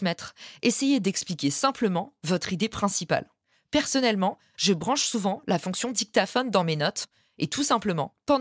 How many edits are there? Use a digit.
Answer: 0